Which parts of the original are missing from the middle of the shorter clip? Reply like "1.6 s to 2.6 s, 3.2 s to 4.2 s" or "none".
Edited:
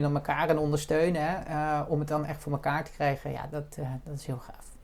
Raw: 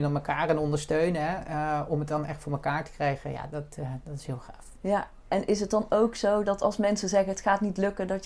none

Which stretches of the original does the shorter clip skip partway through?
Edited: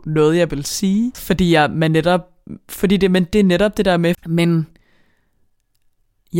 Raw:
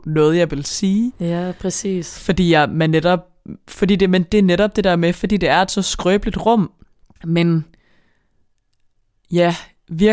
1.1 s to 2.1 s, 5.1 s to 7.1 s

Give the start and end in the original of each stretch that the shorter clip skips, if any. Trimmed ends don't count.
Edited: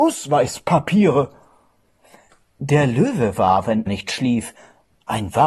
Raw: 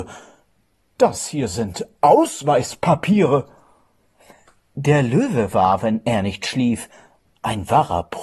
6.0 s to 6.2 s

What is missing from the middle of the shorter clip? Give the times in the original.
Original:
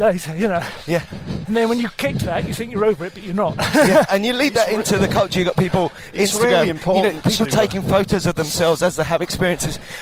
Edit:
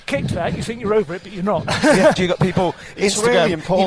4.1 s to 5.3 s

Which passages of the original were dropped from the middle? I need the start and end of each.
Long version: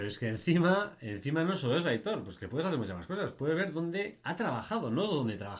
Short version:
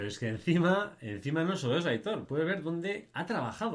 2.2 s to 3.3 s

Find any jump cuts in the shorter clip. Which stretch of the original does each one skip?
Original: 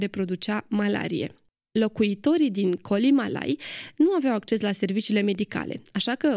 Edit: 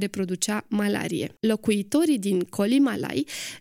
1.4 s to 1.7 s

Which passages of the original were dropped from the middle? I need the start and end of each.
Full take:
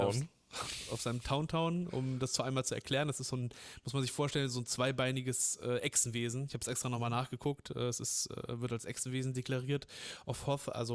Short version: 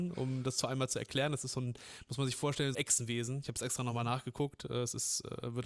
4.5 s to 5.8 s

